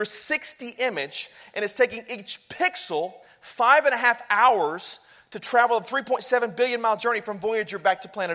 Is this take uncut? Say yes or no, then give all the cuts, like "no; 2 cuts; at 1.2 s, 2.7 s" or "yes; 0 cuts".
yes; 0 cuts